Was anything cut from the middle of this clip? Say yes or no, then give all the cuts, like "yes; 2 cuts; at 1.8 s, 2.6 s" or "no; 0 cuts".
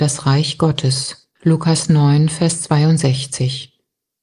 yes; 1 cut; at 1.3 s